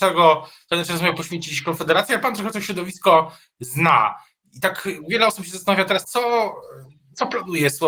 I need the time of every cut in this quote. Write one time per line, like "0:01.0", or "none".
0:06.0